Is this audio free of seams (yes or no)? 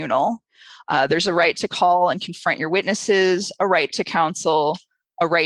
yes